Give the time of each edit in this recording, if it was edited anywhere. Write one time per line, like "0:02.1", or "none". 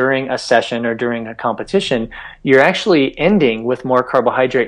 none